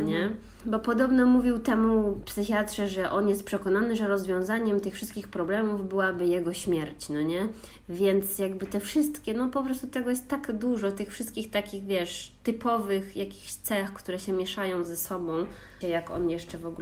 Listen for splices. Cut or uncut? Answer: cut